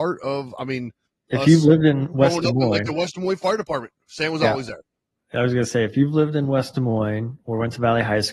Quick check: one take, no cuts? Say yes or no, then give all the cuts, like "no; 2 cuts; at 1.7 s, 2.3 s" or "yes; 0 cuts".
yes; 0 cuts